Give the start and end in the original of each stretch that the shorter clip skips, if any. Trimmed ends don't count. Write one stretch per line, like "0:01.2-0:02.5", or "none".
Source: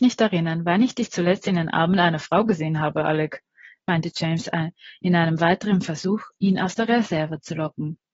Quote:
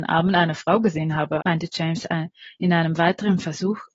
0:03.0-0:03.8

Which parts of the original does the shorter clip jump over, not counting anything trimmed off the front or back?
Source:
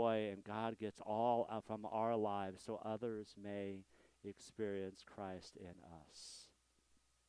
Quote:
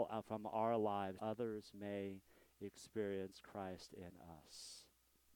0:02.6-0:02.8

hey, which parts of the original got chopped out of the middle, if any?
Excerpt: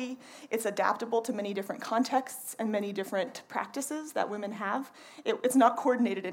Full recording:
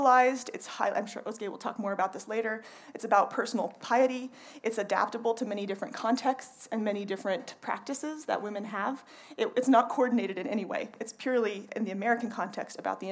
none

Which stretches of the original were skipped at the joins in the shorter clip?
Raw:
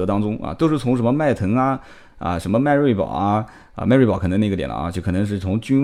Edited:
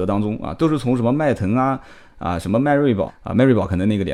0:03.1-0:03.6

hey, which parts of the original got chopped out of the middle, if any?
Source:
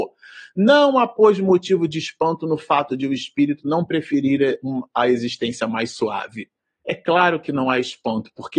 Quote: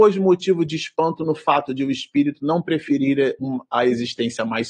none

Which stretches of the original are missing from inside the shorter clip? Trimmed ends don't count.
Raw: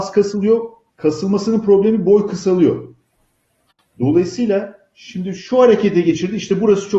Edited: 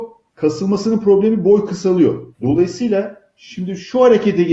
0:02.9-0:03.9

